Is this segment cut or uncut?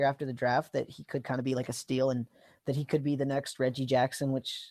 uncut